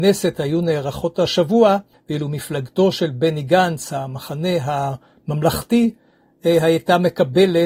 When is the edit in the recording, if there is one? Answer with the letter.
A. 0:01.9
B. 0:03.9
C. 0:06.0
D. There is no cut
A